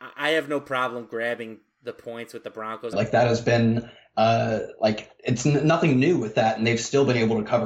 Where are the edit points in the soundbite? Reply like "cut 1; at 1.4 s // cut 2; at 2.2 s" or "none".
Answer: cut 1; at 2.9 s